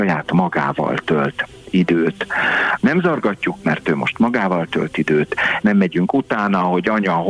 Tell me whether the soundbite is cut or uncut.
cut